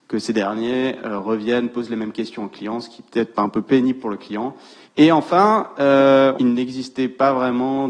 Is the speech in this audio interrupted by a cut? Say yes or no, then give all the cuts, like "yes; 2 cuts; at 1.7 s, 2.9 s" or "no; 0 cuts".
yes; 2 cuts; at 4.8 s, 6.4 s